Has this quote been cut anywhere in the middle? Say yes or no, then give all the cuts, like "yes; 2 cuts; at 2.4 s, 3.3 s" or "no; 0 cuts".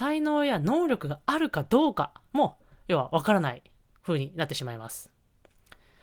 no; 0 cuts